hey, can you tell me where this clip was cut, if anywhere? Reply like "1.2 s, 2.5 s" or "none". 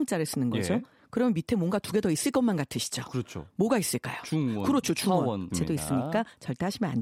5.5 s